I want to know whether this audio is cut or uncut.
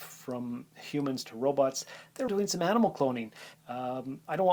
cut